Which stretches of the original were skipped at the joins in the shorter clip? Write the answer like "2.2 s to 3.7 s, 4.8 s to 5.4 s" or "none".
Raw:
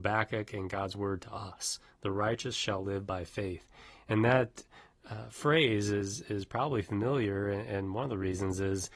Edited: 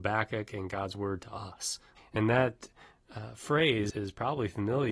2.0 s to 3.9 s, 5.8 s to 6.2 s